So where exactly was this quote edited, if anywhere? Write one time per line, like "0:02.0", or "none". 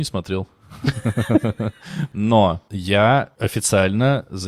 none